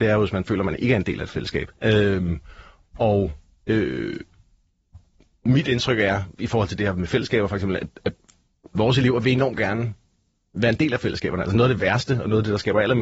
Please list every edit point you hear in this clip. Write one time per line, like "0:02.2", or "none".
0:01.7